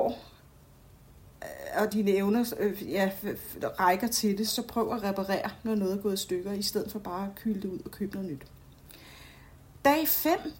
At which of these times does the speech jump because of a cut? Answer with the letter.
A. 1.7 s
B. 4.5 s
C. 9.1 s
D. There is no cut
B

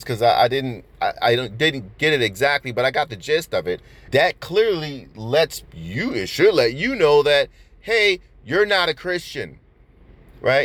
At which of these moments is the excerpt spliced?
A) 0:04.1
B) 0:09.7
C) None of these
A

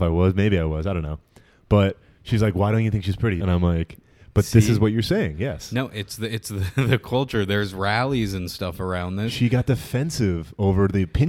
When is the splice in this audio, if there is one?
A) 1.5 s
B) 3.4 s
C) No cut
B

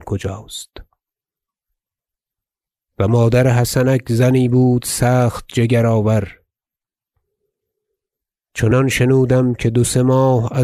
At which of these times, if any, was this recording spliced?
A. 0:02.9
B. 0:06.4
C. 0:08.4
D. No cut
D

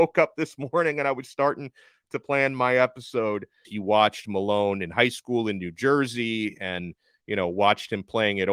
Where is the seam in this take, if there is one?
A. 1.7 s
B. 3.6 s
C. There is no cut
B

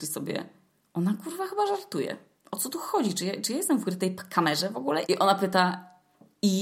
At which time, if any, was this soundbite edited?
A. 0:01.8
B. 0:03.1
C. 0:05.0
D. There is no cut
C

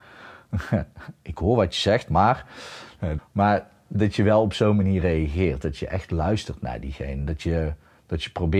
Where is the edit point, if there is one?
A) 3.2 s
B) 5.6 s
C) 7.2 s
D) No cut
A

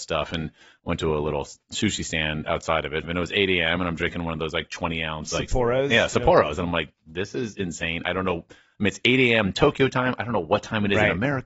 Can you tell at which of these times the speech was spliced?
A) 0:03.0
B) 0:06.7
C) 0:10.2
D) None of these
A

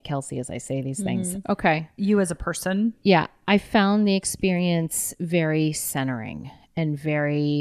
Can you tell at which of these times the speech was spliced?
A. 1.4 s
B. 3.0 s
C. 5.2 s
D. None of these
A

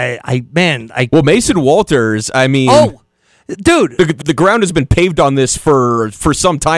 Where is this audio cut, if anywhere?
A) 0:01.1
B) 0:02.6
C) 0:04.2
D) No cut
C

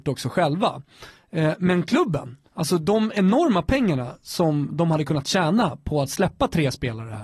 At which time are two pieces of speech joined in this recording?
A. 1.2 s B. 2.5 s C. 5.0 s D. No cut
B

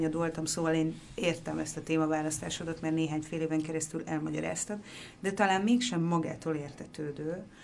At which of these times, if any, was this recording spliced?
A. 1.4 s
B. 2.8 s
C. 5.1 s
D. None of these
D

